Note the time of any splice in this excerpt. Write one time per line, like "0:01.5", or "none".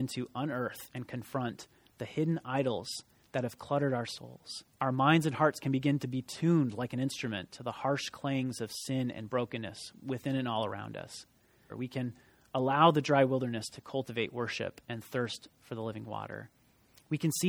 0:04.7
0:11.7